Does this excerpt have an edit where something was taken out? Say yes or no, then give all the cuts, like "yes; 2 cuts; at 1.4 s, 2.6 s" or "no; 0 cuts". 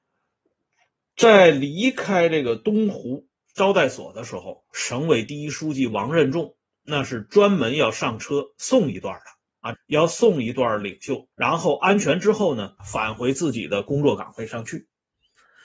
yes; 3 cuts; at 9.7 s, 11.3 s, 12.8 s